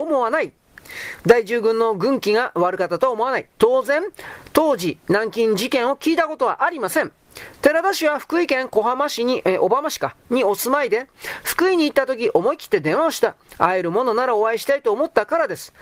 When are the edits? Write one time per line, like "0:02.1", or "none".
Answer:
none